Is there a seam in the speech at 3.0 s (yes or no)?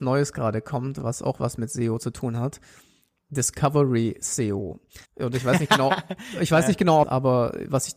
no